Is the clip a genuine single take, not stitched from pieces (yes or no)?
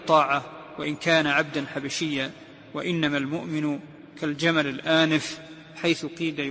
yes